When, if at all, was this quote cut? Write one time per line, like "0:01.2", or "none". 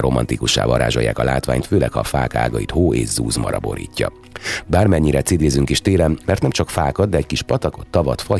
0:04.6
0:06.2